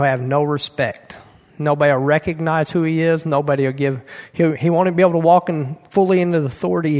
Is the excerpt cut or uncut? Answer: uncut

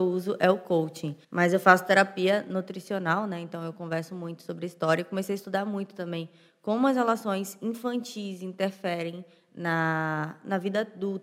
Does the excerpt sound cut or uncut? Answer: cut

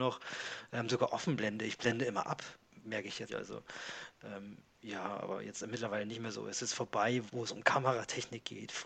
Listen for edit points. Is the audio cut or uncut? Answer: cut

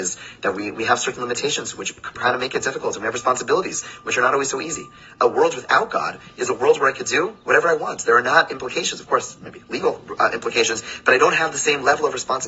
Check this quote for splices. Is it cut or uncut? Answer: uncut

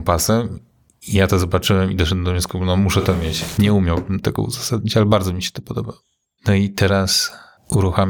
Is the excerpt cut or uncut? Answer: cut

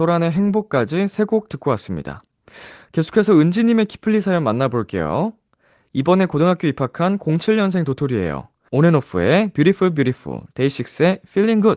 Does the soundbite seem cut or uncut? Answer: cut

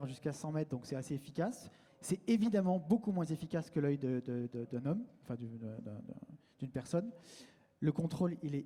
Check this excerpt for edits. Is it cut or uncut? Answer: cut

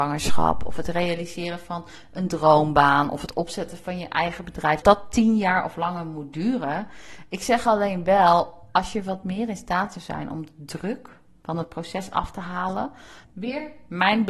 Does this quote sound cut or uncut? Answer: cut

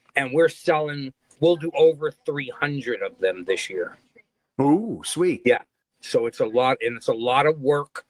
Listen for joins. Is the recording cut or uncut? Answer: uncut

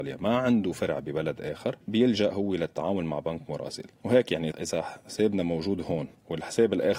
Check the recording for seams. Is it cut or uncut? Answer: cut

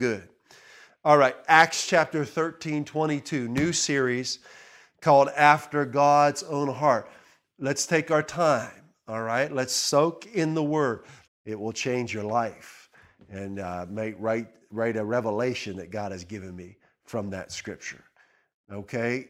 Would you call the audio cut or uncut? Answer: cut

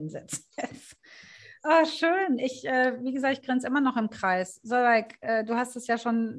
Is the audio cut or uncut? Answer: uncut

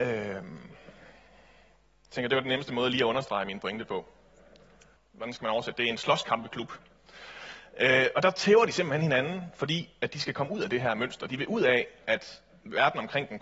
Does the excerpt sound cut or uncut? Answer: cut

